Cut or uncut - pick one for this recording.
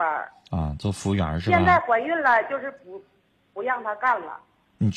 uncut